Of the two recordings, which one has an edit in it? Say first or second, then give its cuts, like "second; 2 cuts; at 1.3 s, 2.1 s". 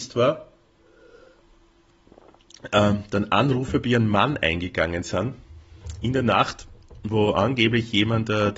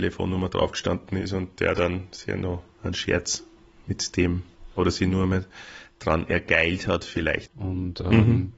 second; 1 cut; at 7.5 s